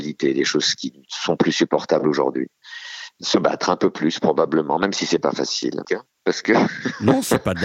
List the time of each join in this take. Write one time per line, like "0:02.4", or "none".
0:05.8